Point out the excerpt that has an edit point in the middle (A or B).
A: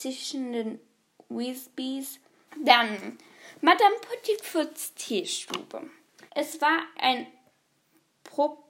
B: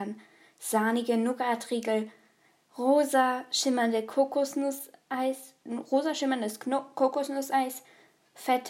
A